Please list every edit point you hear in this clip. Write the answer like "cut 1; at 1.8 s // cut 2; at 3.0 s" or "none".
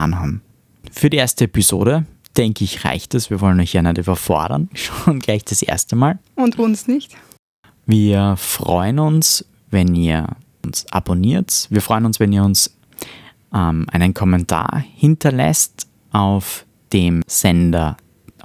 none